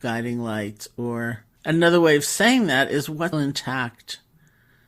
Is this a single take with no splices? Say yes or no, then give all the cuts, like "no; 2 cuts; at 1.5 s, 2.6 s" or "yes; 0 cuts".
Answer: no; 2 cuts; at 1.6 s, 3.3 s